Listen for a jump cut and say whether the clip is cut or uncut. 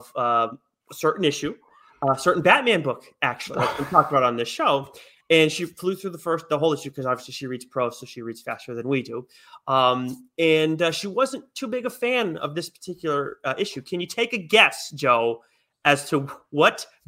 uncut